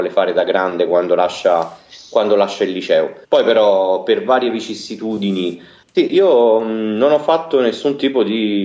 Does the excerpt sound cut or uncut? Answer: cut